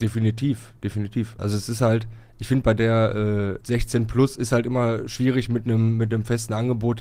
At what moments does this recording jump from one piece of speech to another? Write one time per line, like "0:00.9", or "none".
0:01.4
0:03.6